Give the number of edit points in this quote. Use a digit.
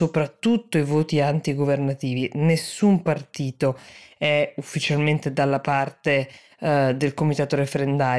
0